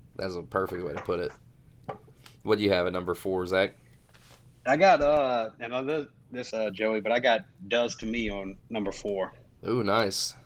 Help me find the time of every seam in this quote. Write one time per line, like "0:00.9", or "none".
0:06.5
0:08.6